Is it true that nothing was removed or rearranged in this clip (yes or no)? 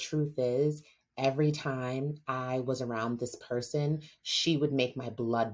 yes